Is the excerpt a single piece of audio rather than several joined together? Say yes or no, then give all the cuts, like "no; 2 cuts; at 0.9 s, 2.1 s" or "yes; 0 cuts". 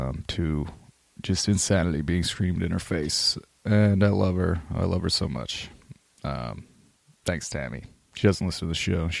yes; 0 cuts